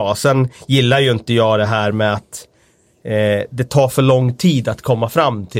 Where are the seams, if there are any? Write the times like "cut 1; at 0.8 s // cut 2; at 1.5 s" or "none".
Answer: none